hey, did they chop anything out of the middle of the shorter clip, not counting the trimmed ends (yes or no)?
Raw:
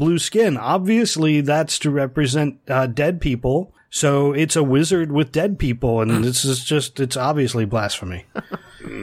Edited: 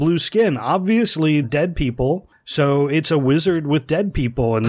yes